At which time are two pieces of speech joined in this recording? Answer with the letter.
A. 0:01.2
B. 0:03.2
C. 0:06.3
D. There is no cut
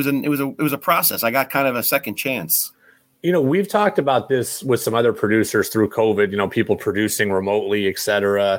D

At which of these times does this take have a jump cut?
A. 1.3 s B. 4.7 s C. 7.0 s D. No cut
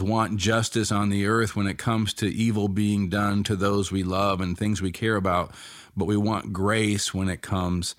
D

